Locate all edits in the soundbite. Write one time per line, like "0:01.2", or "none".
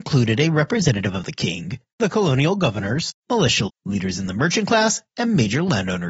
0:03.7